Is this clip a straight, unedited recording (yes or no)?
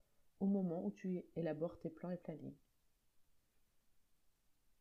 yes